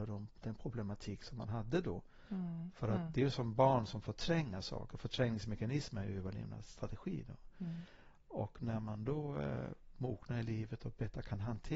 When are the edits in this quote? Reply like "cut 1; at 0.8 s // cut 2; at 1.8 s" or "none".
none